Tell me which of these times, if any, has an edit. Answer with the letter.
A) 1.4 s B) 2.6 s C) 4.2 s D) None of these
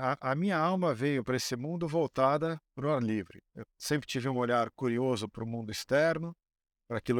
B